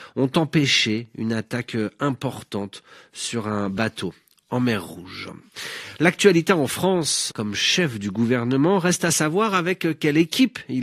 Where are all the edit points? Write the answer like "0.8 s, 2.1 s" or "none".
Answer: 7.3 s